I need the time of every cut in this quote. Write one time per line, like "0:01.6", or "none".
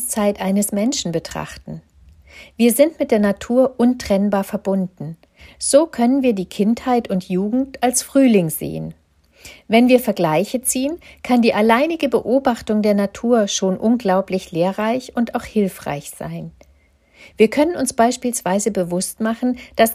none